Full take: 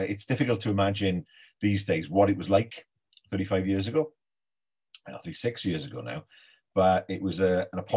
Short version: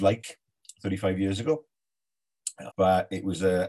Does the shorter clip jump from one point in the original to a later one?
yes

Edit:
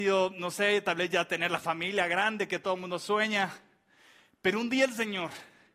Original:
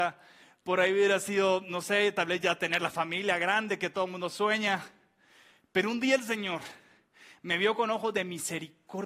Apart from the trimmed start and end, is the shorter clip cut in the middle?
no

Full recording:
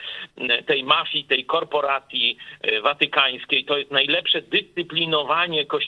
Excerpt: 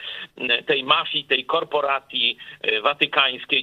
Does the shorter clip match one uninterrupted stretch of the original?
yes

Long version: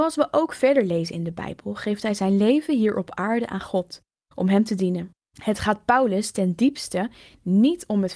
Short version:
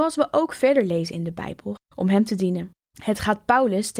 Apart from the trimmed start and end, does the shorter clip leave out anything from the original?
yes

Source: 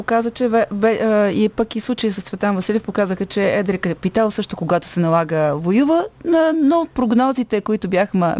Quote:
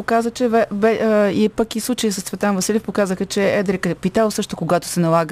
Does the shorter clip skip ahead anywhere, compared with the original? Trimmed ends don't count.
no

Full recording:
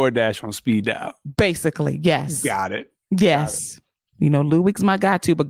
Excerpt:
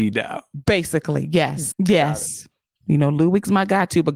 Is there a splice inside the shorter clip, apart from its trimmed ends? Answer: yes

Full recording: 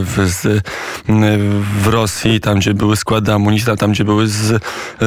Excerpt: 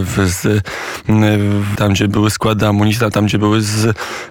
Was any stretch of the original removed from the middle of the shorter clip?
yes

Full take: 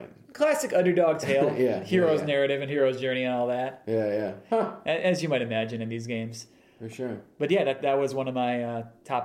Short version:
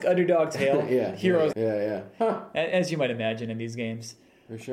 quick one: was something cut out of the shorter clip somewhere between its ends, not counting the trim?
yes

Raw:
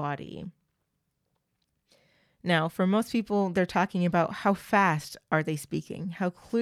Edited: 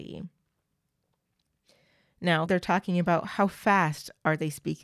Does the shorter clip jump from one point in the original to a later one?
yes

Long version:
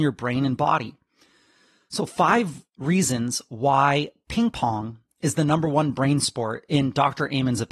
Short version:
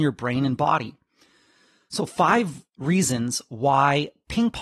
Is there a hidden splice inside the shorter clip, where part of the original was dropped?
no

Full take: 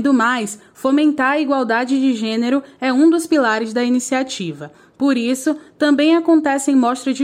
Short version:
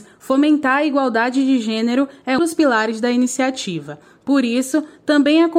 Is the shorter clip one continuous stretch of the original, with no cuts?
no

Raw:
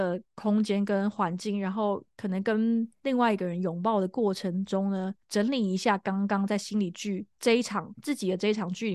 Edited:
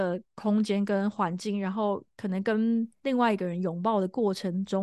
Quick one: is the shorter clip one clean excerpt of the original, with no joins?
yes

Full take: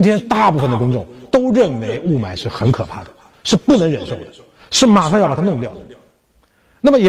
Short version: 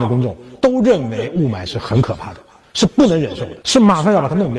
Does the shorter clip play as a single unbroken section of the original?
no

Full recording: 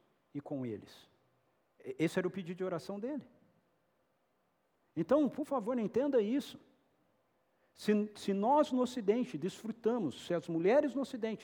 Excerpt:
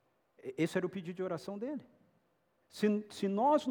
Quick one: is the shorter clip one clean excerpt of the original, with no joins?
no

